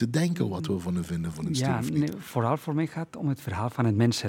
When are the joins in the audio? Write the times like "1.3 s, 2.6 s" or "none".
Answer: none